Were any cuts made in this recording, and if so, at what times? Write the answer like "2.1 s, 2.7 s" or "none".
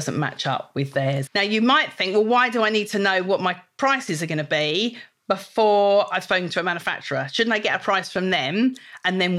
1.3 s